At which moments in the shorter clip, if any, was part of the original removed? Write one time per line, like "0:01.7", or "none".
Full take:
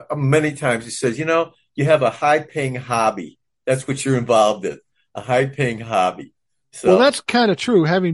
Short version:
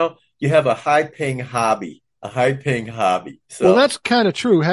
0:02.2
0:03.4